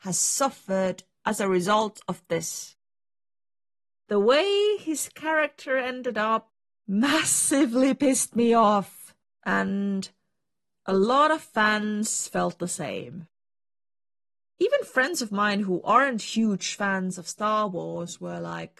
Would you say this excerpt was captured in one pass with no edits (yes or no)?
yes